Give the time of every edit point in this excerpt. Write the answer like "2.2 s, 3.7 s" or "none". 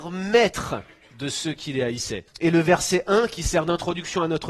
2.3 s